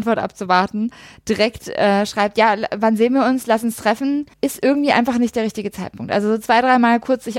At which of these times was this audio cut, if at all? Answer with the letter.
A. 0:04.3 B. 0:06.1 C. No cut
A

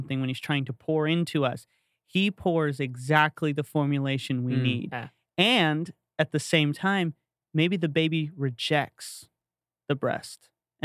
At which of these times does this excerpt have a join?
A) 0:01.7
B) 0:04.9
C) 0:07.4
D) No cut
D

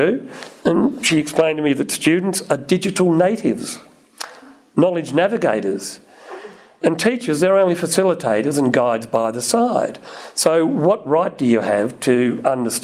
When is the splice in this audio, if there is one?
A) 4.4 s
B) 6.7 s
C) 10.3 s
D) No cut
D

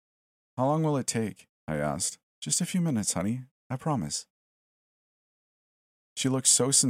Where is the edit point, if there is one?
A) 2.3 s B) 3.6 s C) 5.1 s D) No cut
A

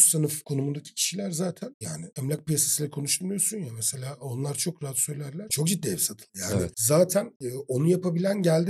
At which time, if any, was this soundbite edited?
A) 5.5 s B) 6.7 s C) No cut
A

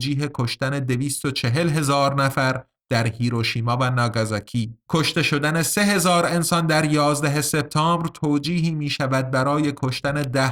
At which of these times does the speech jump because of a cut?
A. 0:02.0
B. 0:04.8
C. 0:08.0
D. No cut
B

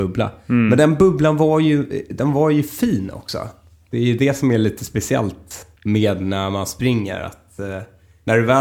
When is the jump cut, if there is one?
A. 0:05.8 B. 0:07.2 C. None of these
A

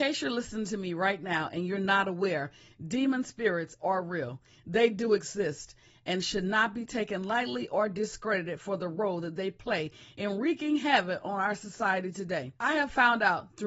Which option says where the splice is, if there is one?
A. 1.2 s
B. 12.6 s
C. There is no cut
B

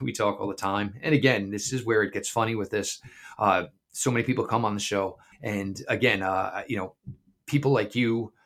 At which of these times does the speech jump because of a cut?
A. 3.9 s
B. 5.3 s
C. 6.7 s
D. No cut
B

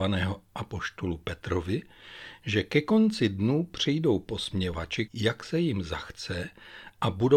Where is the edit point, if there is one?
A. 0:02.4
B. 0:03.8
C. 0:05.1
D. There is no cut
C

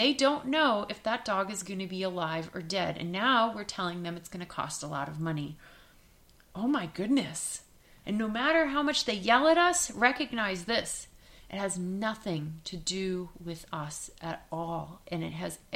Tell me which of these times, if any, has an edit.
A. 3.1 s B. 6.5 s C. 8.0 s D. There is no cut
C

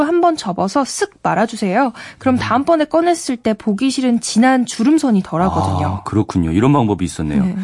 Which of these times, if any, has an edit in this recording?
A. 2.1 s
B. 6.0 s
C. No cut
C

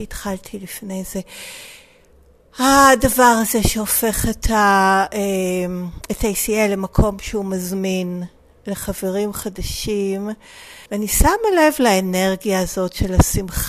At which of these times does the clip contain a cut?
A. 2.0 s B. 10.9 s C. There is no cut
B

